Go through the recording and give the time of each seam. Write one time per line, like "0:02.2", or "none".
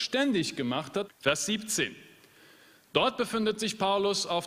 0:01.1